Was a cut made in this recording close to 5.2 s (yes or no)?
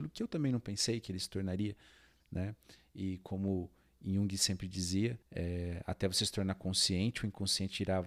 yes